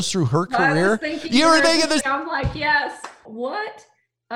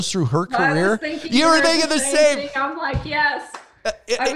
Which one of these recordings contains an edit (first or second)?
first